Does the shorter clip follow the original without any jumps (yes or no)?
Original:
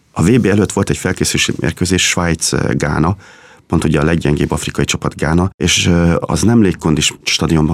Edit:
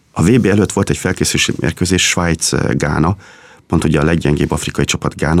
yes